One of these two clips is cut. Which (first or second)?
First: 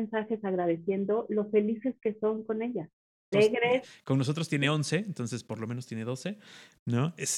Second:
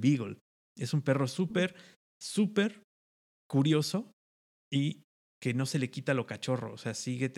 first